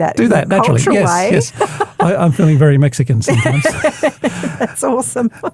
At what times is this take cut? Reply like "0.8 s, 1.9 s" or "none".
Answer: none